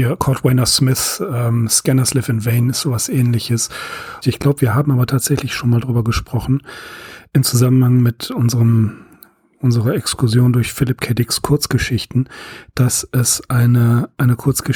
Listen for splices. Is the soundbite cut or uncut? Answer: cut